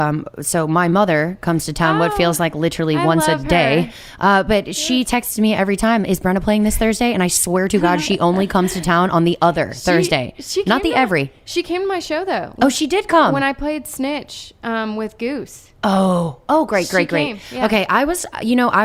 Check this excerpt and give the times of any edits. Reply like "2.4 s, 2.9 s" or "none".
none